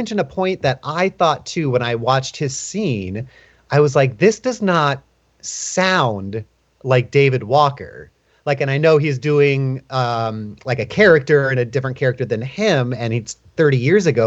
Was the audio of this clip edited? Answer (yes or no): no